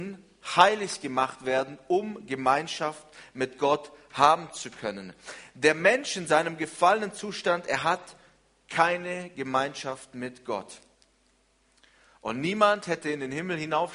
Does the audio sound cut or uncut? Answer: uncut